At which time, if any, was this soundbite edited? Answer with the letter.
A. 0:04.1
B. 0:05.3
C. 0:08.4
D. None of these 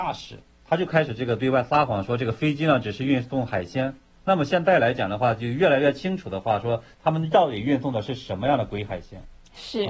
D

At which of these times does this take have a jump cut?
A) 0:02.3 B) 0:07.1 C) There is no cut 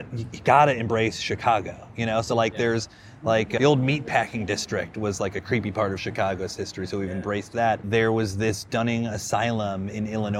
C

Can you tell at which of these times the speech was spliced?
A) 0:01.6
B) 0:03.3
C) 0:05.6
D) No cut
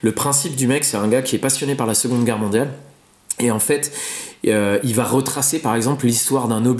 D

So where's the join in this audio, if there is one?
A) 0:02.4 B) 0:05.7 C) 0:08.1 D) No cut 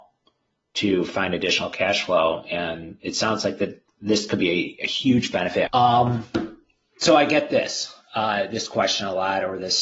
B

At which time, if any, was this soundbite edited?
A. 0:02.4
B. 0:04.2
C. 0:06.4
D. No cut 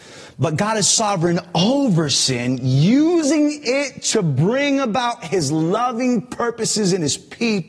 D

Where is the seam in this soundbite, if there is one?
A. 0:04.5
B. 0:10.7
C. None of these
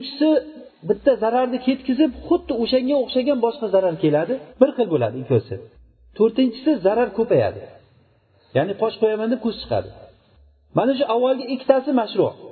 A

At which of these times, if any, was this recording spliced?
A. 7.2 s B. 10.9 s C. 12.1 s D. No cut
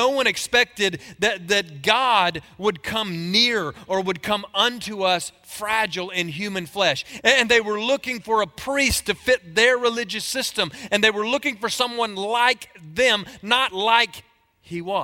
A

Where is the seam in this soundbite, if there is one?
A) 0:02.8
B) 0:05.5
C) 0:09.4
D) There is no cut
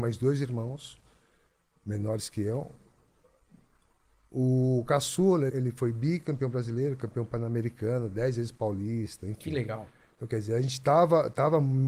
B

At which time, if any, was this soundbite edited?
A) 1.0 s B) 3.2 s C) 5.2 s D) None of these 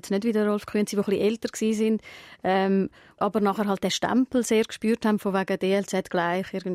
B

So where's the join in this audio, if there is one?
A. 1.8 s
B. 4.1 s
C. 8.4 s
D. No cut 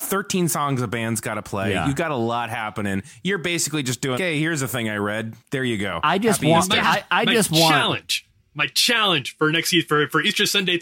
B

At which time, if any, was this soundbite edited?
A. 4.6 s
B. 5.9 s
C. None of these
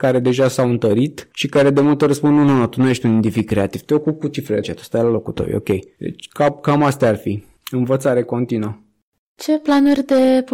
A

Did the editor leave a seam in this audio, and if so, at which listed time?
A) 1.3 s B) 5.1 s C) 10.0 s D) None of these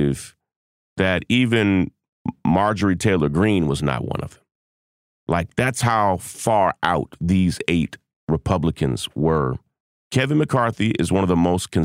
C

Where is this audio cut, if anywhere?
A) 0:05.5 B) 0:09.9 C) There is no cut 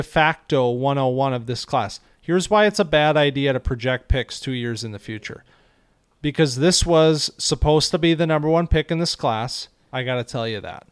B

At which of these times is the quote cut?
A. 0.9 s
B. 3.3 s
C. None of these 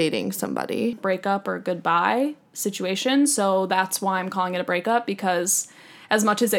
A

